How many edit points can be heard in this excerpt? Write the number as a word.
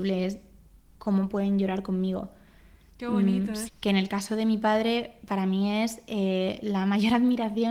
one